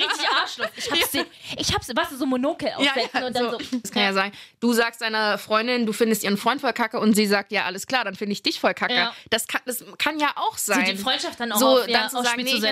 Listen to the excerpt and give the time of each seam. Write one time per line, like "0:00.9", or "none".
0:03.8